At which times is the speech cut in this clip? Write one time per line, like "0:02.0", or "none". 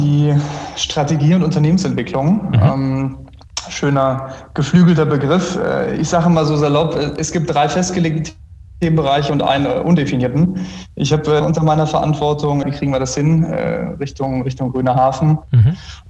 0:11.4
0:12.6